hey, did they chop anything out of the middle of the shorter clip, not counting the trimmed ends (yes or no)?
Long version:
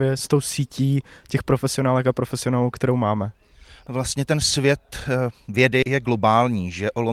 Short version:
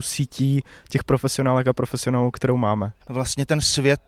yes